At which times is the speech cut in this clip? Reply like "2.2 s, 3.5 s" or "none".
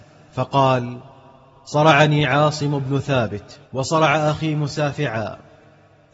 3.6 s